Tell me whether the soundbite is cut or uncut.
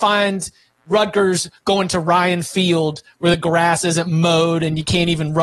uncut